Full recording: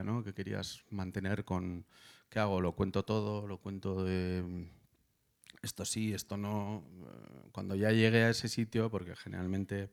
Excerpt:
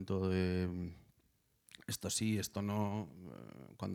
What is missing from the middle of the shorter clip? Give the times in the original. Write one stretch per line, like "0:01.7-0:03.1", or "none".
none